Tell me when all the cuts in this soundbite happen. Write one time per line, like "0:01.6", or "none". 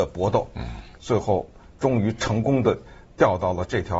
0:01.0